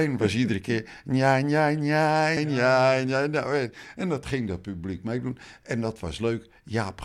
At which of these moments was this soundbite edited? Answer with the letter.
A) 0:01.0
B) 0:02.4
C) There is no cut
B